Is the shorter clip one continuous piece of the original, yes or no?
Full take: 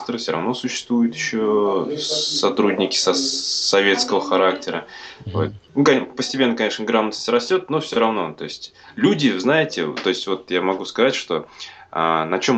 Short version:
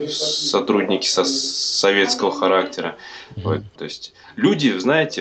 no